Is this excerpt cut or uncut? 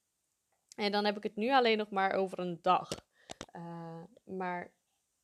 cut